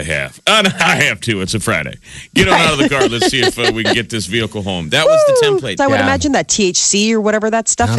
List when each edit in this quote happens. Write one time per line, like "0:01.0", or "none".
0:05.8